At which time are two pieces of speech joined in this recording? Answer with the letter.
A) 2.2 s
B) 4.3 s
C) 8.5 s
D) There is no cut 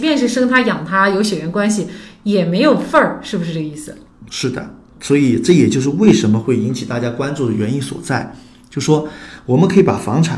B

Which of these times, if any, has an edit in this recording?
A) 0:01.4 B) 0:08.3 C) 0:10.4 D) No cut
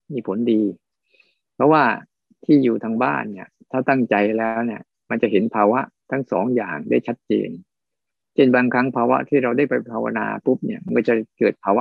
C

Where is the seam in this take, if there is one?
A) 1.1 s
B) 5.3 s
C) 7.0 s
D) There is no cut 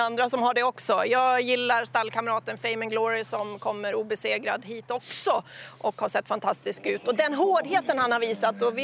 D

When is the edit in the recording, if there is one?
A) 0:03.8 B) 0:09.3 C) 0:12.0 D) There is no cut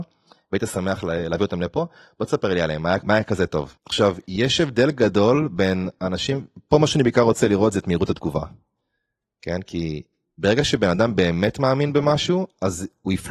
A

